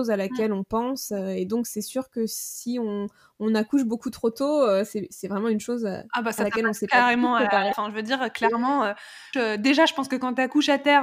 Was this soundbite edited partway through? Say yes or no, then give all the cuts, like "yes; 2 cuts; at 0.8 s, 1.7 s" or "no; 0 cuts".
yes; 2 cuts; at 7.7 s, 9.3 s